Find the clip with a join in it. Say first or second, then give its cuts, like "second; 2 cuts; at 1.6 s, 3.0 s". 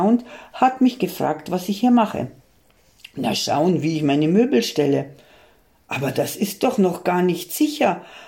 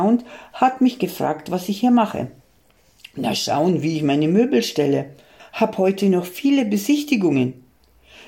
second; 1 cut; at 5.4 s